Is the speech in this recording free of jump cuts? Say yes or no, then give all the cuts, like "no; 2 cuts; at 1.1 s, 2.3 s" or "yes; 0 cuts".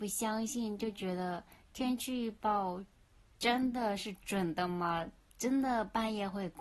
yes; 0 cuts